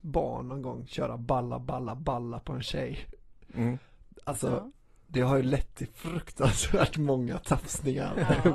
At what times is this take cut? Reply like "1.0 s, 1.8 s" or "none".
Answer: none